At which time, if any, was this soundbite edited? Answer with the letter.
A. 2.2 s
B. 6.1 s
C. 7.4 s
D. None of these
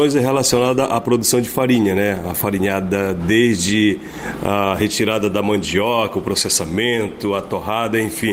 D